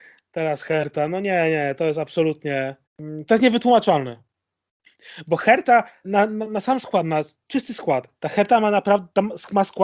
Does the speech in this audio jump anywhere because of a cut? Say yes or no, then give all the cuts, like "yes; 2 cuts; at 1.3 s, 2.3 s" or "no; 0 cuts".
yes; 3 cuts; at 2.9 s, 6.0 s, 8.2 s